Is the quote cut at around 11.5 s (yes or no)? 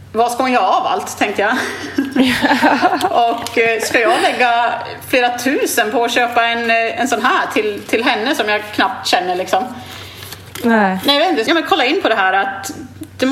yes